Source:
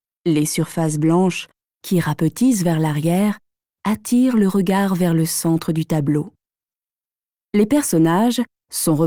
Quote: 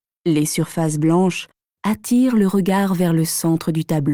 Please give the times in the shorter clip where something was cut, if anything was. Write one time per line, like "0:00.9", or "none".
0:01.7